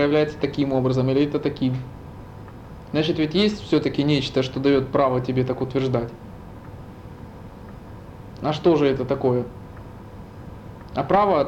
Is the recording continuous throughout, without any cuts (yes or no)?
yes